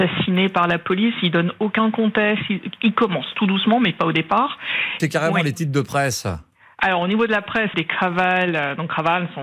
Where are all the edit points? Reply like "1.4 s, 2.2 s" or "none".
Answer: 5.0 s, 7.7 s